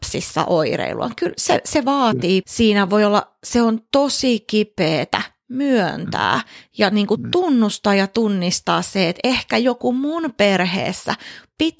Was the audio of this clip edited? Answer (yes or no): yes